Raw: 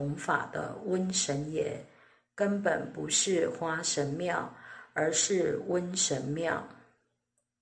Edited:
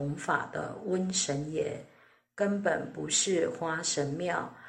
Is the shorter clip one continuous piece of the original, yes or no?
yes